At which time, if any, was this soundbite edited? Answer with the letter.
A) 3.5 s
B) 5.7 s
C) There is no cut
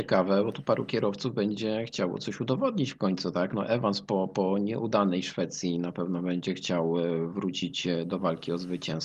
C